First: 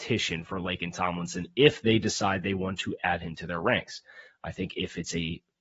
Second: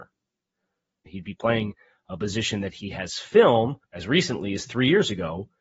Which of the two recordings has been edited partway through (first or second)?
second